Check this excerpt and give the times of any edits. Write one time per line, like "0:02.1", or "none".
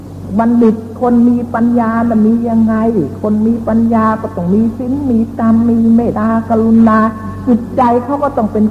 0:06.1